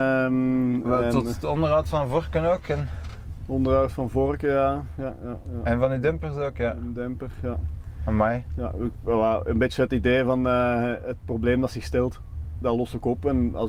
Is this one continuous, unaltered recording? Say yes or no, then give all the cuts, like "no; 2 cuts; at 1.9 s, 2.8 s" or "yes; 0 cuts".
yes; 0 cuts